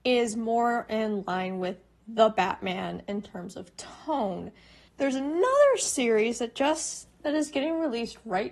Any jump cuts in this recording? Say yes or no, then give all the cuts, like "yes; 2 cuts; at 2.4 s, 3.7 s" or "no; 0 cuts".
yes; 1 cut; at 4.9 s